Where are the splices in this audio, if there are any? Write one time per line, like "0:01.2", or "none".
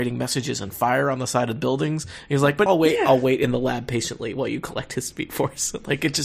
0:02.7